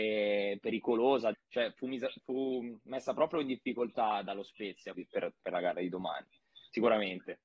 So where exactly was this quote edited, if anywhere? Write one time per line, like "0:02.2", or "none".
0:01.3
0:04.9